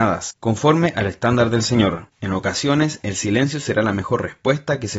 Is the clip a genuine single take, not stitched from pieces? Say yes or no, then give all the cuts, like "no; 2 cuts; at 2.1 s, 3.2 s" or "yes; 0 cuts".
no; 1 cut; at 2.1 s